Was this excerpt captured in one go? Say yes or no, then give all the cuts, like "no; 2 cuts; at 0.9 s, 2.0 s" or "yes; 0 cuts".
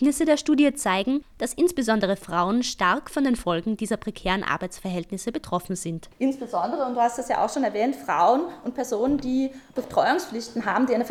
yes; 0 cuts